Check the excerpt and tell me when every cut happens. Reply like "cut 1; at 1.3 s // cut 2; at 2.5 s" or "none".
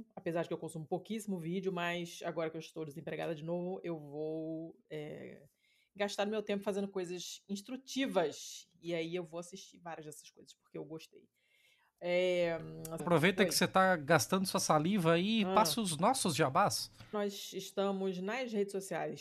cut 1; at 13.0 s // cut 2; at 17.1 s